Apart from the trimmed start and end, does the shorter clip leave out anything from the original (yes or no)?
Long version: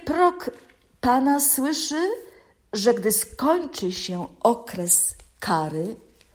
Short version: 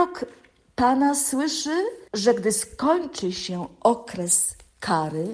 yes